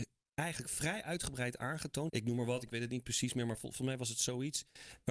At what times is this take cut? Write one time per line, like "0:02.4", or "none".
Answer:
0:02.1